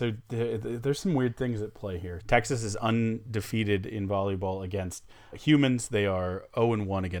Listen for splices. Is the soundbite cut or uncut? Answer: cut